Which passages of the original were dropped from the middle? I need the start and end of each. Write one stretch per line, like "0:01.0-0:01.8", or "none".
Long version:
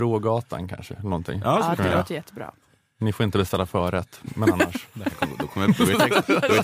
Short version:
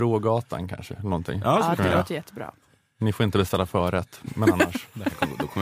none